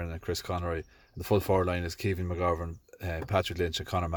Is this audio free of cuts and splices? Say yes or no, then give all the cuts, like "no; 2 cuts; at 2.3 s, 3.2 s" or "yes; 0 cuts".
yes; 0 cuts